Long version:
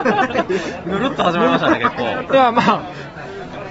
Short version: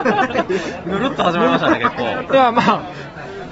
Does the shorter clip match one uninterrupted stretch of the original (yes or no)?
yes